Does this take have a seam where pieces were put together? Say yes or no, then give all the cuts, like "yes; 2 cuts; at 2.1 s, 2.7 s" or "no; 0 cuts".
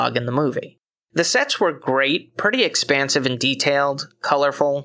no; 0 cuts